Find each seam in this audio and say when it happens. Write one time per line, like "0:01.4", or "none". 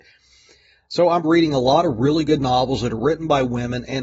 0:01.2